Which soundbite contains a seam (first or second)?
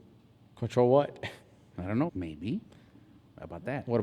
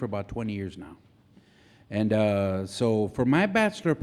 first